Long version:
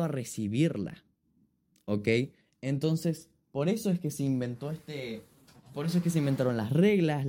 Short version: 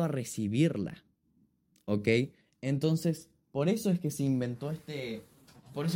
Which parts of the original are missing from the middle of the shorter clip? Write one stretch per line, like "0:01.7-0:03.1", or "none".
none

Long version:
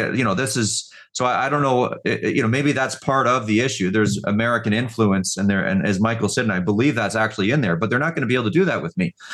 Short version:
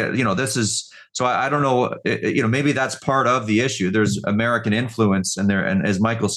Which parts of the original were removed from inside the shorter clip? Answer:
none

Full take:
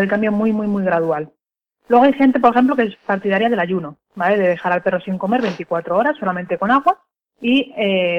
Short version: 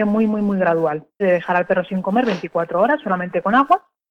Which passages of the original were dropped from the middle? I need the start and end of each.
0:01.5-0:04.4

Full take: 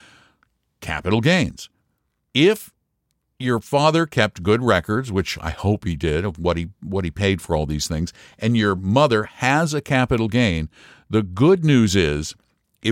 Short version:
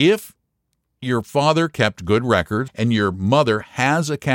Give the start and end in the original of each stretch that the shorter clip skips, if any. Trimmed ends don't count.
0:05.1-0:08.3

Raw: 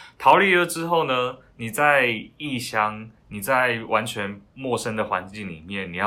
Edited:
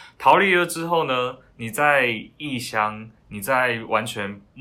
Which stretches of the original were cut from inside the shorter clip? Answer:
none

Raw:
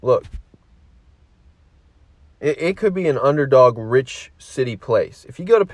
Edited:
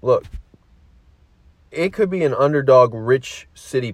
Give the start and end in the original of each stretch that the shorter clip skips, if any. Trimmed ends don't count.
0:01.7-0:02.6

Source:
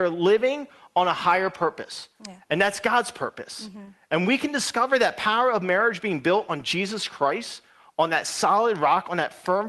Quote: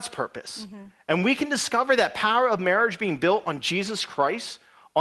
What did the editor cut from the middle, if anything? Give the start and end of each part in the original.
none

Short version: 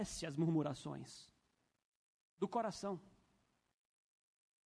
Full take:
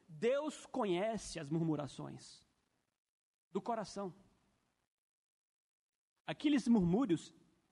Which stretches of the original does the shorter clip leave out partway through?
none

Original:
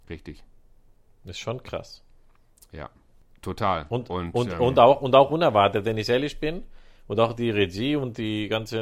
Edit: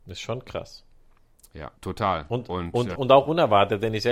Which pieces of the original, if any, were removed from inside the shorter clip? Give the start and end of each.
0:02.9-0:03.4
0:04.6-0:05.0

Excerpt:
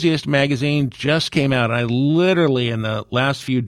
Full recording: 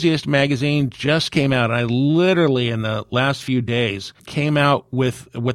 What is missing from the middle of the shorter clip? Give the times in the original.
none

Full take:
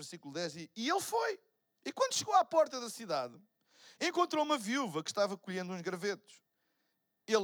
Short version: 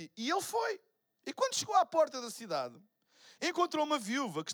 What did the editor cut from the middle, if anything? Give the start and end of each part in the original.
none

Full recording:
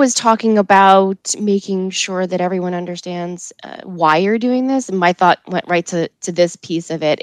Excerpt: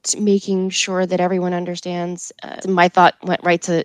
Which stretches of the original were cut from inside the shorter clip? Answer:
0:03.8-0:04.9

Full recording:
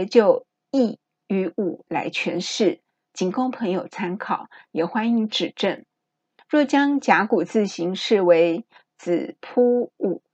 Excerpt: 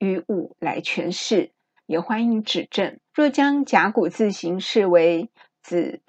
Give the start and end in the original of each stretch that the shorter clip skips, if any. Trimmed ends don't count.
0:03.1-0:04.6
0:05.9-0:06.4

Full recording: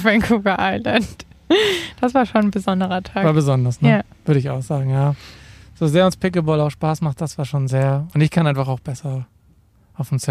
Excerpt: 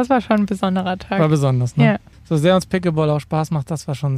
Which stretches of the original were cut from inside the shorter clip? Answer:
0:04.2-0:05.6

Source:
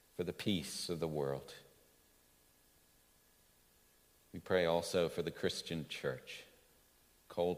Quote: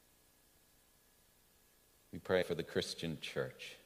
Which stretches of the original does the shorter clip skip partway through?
0:04.6-0:05.1

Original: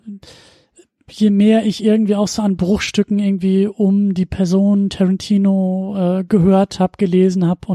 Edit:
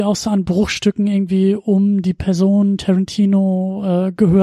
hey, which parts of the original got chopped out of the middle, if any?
none

